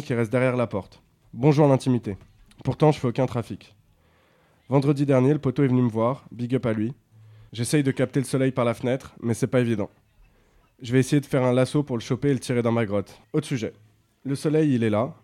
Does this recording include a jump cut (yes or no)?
yes